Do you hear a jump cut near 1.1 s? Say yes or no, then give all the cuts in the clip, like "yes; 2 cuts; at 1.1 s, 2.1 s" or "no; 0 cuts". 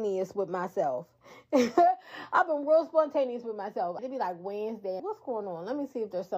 no; 2 cuts; at 4.0 s, 5.0 s